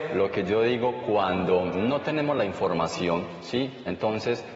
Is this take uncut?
yes; 0 cuts

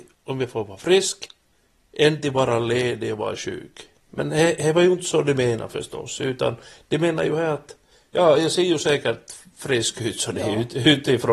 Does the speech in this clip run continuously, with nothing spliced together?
yes; 0 cuts

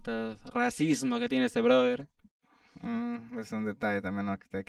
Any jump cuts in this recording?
no; 0 cuts

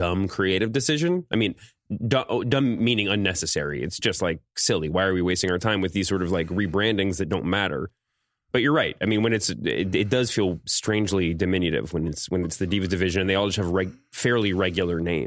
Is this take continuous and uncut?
yes; 0 cuts

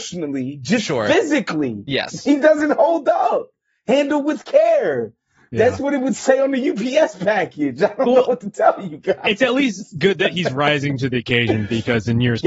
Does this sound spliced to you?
no; 0 cuts

